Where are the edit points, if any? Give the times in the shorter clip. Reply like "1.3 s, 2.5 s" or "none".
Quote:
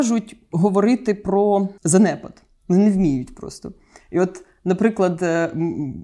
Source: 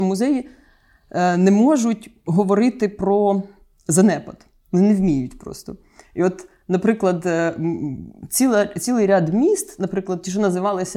1.8 s